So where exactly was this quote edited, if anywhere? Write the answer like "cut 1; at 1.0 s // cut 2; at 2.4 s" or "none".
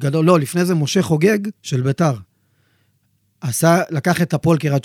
cut 1; at 1.5 s